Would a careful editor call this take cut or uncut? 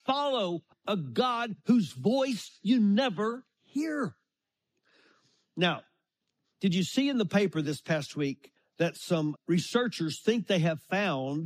cut